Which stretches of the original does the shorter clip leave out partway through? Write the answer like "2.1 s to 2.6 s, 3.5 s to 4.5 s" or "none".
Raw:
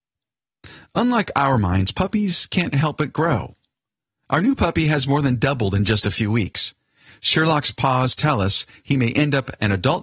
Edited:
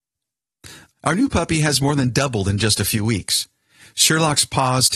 0.9 s to 4.2 s